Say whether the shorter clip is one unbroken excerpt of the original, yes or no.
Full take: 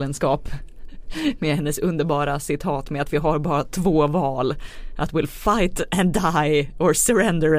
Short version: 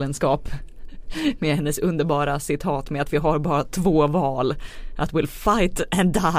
yes